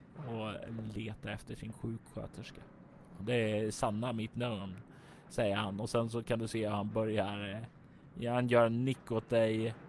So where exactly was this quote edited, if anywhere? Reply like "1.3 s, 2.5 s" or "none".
3.2 s

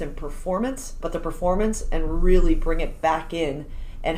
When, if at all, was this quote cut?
1.0 s

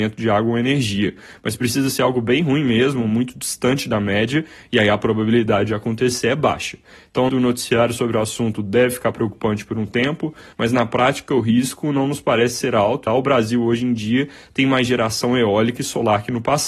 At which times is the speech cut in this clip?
7.3 s, 10.5 s, 13.1 s

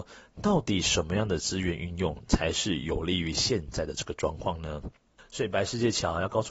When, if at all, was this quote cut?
5.2 s

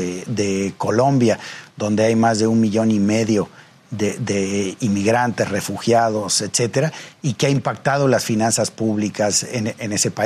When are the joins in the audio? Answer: none

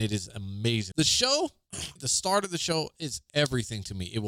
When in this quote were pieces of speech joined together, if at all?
0.9 s, 2.0 s

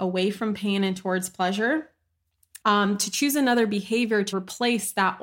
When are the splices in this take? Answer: 2.6 s, 4.3 s

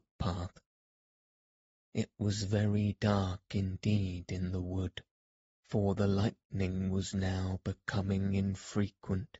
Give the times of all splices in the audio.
none

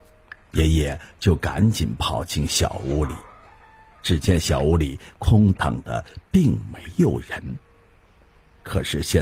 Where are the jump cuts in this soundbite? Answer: 5.6 s

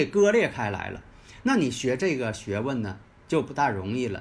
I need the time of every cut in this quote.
none

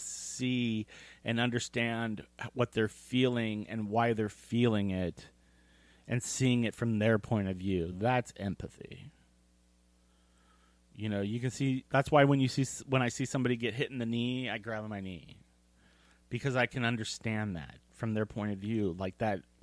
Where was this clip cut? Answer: none

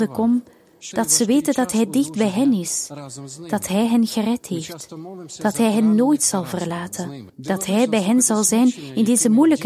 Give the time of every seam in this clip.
0.9 s, 7.3 s

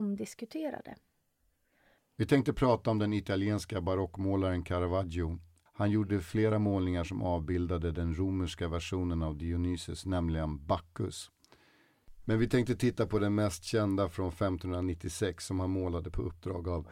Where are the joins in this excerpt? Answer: none

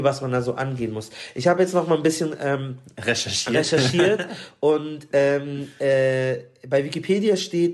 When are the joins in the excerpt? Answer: none

